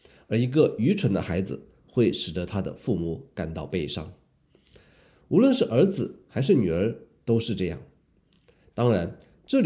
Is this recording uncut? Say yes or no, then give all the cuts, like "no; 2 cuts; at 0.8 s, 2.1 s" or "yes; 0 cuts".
yes; 0 cuts